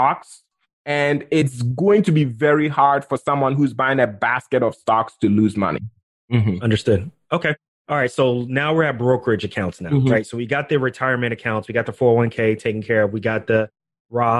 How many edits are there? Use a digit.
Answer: 0